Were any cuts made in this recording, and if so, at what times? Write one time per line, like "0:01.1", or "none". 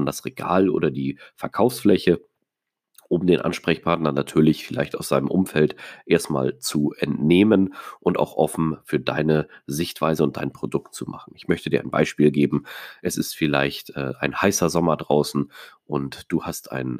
none